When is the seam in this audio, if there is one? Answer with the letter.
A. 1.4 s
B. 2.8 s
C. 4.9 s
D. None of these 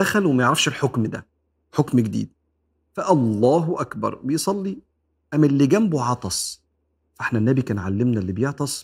D